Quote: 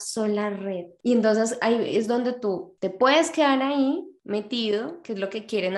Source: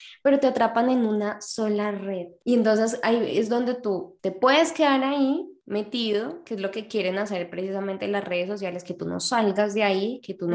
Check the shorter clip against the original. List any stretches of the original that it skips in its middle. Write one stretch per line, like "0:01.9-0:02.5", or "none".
none